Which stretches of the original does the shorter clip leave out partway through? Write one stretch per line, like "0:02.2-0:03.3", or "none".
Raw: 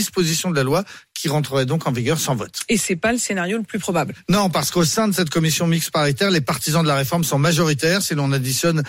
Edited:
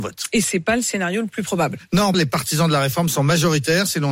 0:04.5-0:06.3